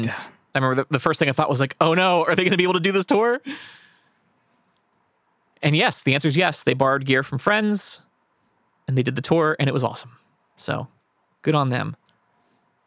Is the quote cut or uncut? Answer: cut